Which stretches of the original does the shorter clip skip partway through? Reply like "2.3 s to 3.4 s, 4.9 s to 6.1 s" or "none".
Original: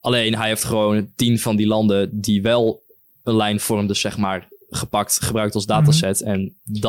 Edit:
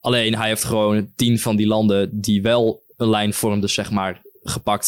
2.9 s to 3.2 s